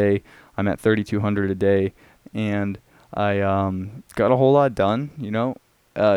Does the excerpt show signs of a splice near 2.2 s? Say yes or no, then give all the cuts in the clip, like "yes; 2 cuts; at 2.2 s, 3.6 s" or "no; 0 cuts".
yes; 1 cut; at 2.2 s